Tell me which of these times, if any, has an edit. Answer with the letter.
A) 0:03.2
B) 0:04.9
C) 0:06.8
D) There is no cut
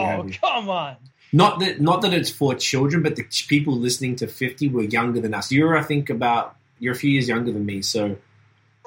C